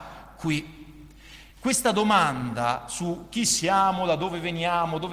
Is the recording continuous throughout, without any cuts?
yes; 0 cuts

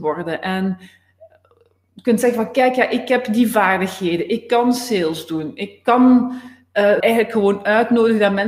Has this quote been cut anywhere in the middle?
yes; 1 cut; at 7.0 s

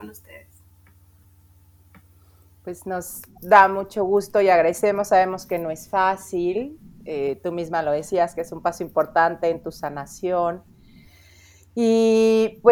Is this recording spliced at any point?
no; 0 cuts

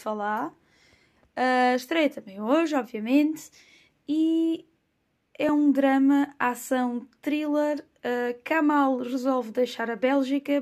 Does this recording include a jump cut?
no; 0 cuts

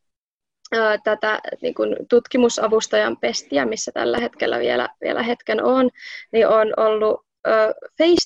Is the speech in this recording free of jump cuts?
yes; 0 cuts

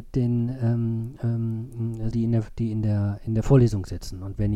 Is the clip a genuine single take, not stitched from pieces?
no; 1 cut; at 2.1 s

